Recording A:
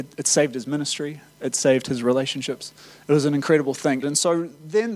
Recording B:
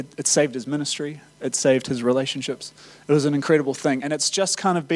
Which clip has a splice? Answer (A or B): A